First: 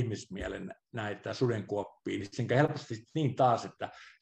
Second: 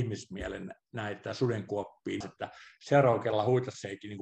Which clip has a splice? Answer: second; 1 cut; at 2.2 s

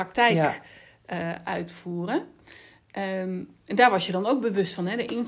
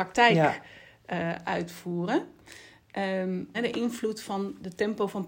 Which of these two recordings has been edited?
second; 1 cut; at 3.5 s

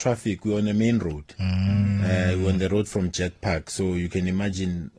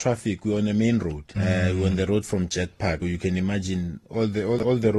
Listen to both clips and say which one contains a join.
second; 2 cuts; at 1.4 s, 3.0 s

